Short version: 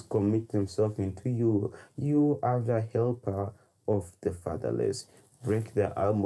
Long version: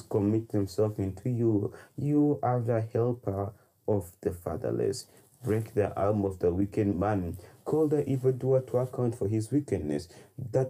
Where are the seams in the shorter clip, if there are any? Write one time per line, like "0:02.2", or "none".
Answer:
none